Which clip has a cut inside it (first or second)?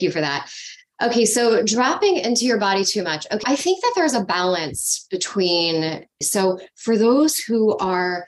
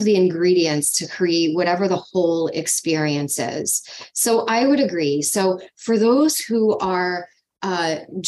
first